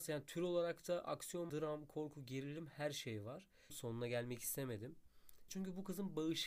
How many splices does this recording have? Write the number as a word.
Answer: three